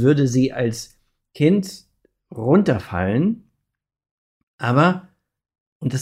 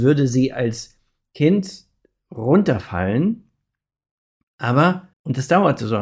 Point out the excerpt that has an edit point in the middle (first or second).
second